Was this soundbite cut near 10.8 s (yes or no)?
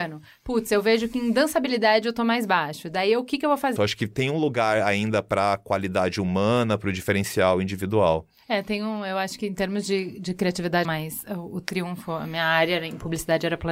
yes